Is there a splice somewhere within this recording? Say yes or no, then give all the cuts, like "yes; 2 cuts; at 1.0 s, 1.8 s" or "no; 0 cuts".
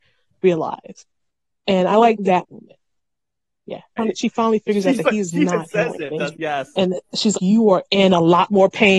yes; 3 cuts; at 4.0 s, 6.3 s, 7.3 s